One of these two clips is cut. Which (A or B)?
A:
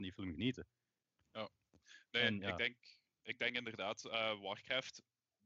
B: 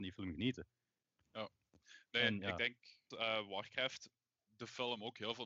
B